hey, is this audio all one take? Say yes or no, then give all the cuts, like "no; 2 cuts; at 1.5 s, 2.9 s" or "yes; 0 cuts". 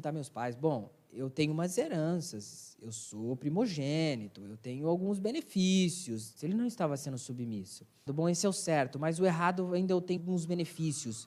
no; 3 cuts; at 6.4 s, 8.1 s, 10.2 s